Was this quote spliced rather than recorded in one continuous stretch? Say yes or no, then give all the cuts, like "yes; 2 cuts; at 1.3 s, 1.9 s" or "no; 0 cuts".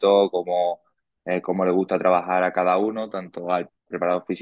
no; 0 cuts